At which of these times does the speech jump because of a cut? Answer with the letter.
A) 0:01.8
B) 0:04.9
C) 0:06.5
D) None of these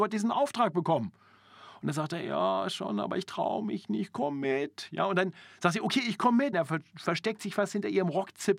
C